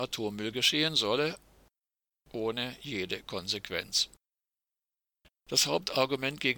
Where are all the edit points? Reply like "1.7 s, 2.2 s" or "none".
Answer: 5.3 s